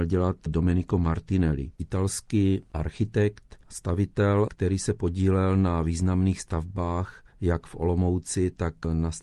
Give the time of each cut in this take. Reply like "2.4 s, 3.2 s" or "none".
7.3 s